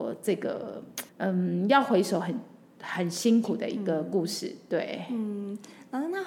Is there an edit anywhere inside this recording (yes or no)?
yes